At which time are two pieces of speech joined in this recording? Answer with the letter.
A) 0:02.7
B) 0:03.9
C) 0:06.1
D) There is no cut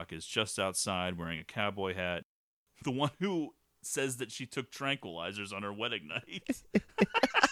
A